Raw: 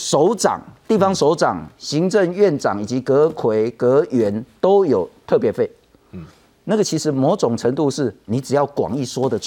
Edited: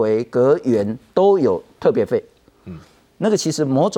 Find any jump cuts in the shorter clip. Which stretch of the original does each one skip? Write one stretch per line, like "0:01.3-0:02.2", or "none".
none